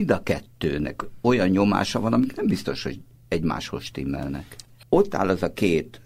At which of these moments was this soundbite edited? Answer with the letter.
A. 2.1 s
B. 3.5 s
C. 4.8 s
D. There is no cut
C